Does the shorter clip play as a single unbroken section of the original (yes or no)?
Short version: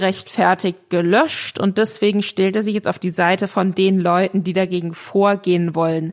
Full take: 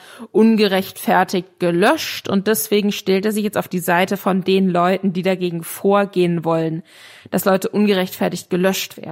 yes